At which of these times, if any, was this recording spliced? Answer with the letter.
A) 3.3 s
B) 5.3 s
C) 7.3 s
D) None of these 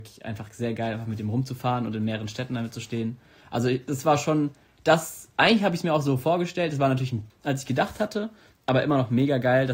C